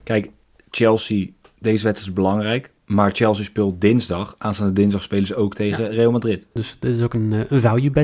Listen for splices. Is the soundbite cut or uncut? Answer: cut